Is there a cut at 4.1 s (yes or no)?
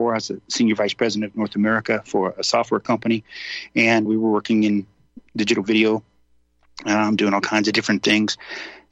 yes